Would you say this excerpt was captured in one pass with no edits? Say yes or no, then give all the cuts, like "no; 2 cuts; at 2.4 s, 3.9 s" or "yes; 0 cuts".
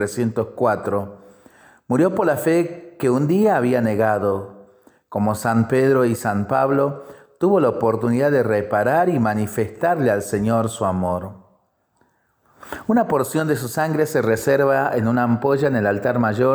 yes; 0 cuts